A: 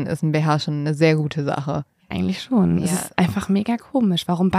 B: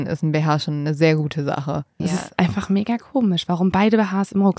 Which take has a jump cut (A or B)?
B